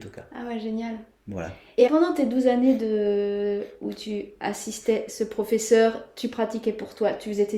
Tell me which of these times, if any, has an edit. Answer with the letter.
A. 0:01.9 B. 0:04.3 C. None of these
A